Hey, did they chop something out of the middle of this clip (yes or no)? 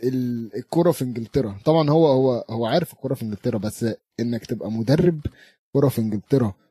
no